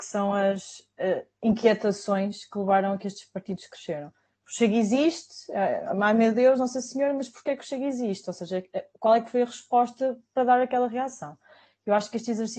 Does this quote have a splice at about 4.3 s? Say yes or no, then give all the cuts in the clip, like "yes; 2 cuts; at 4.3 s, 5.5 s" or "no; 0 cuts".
yes; 1 cut; at 4.3 s